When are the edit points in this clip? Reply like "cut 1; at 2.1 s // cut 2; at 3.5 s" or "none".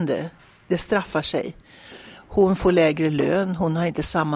none

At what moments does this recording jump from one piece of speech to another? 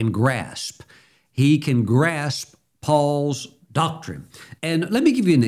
cut 1; at 4.6 s

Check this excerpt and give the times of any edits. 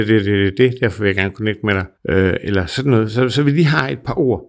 cut 1; at 2.0 s

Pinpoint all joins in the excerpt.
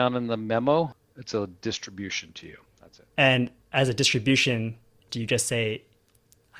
cut 1; at 2.6 s // cut 2; at 5.1 s

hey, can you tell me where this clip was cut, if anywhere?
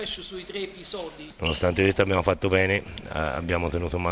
cut 1; at 1.3 s

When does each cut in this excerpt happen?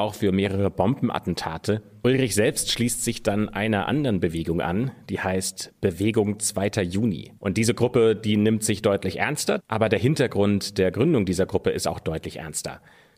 cut 1; at 2.0 s // cut 2; at 7.4 s // cut 3; at 9.6 s

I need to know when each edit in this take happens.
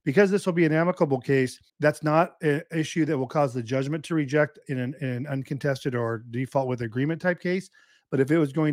cut 1; at 1.7 s

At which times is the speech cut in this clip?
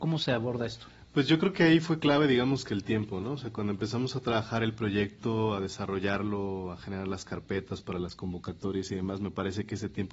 none

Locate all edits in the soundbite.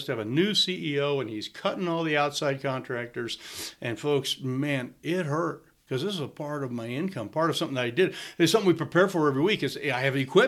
none

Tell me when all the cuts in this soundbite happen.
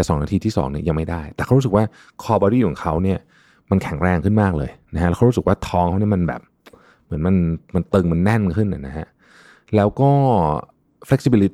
none

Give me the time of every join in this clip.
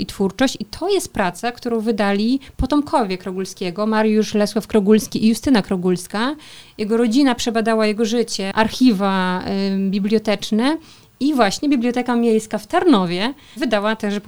cut 1; at 8.5 s

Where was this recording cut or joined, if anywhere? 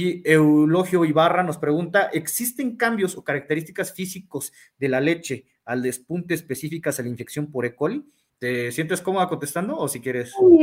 cut 1; at 8.3 s

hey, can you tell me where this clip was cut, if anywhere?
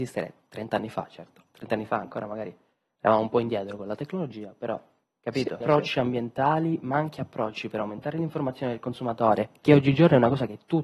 cut 1; at 5.6 s

